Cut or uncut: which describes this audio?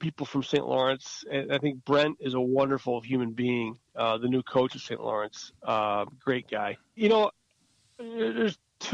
cut